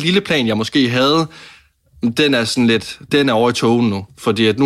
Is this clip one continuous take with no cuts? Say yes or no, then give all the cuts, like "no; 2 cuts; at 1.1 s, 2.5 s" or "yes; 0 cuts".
no; 1 cut; at 3.1 s